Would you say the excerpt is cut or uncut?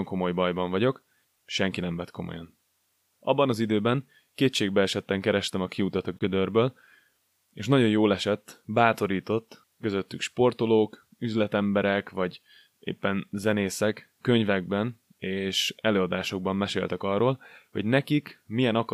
cut